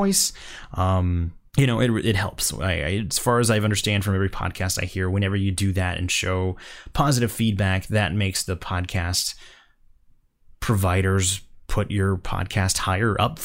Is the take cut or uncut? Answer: cut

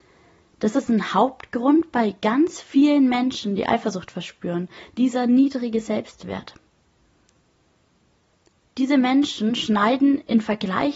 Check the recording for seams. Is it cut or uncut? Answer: uncut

